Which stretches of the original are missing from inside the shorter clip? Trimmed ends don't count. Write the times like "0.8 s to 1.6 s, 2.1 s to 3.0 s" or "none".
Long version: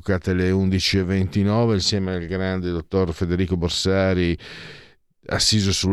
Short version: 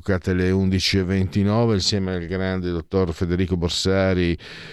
none